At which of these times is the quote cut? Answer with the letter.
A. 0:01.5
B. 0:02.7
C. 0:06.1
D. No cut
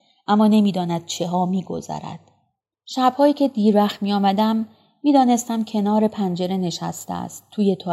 B